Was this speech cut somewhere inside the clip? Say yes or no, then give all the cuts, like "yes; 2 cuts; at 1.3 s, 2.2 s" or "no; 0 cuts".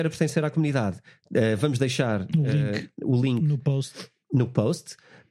no; 0 cuts